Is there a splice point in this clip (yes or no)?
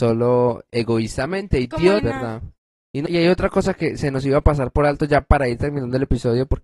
yes